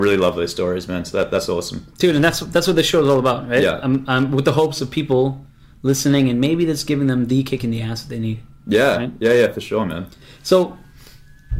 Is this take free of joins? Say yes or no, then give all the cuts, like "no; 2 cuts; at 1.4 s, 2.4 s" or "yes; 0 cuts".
yes; 0 cuts